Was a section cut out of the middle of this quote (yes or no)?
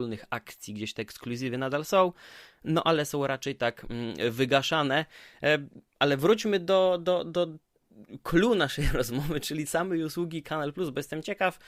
yes